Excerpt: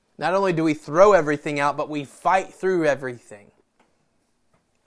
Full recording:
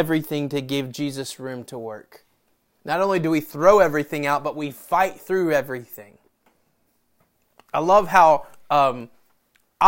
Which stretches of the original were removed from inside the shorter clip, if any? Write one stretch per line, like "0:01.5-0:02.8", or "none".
none